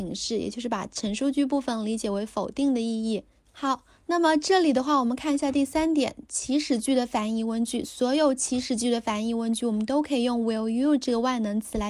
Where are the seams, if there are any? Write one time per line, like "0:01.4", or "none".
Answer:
0:03.4